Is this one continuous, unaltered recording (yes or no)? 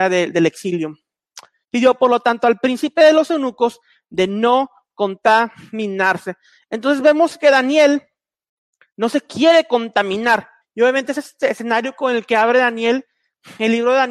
no